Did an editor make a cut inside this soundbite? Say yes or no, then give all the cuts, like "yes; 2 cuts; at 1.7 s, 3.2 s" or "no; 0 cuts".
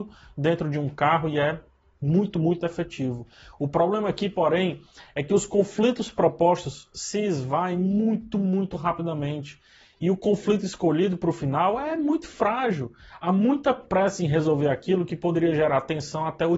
no; 0 cuts